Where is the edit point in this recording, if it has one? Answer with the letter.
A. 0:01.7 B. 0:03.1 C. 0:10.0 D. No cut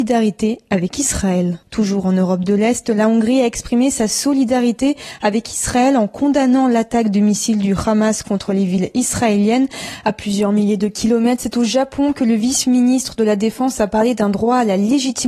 A